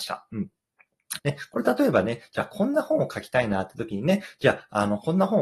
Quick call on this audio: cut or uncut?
cut